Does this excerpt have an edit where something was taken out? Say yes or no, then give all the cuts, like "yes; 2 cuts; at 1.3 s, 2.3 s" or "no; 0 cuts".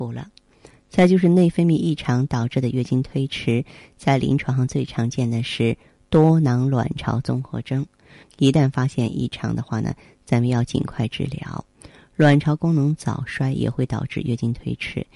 yes; 1 cut; at 8.2 s